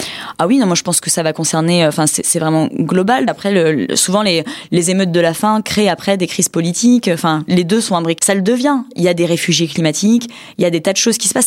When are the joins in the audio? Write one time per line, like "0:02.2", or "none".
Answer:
0:03.3
0:08.2